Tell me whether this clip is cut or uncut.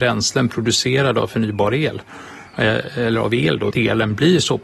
cut